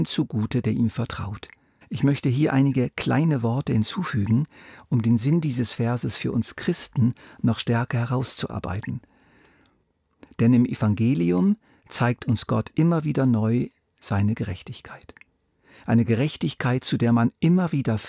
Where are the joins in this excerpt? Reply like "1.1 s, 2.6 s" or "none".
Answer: 1.8 s